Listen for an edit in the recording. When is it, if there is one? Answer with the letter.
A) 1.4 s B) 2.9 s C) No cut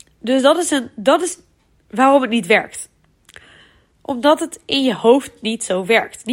C